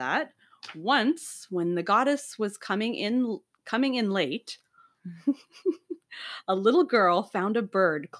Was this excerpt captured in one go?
yes; 0 cuts

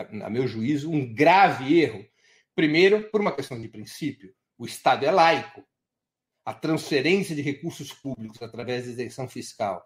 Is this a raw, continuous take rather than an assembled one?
yes; 0 cuts

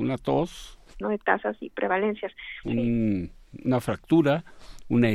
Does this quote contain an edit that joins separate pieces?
yes; 2 cuts; at 1.0 s, 2.6 s

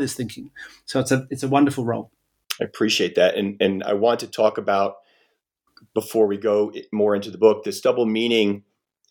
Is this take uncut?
yes; 0 cuts

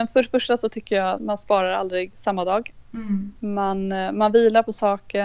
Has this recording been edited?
yes; 1 cut; at 1.2 s

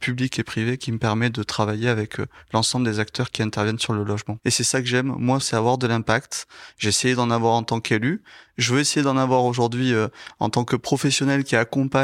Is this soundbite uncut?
no; 2 cuts; at 4.4 s, 5.4 s

